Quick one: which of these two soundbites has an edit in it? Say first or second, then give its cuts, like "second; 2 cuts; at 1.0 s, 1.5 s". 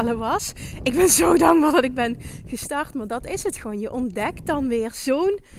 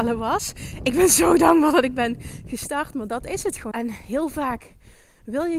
second; 1 cut; at 3.7 s